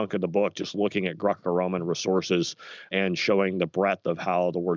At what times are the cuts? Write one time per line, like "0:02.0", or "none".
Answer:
0:02.9